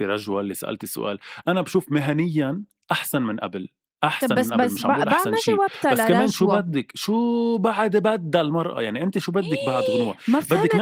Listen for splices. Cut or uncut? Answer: uncut